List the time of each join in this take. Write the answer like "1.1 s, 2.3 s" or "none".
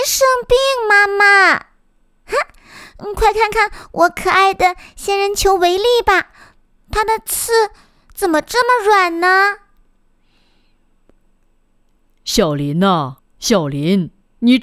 13.2 s